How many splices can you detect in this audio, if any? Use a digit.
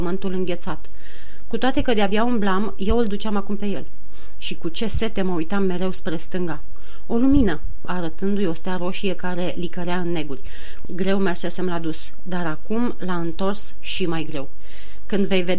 2